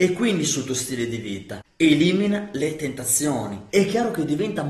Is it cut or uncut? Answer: cut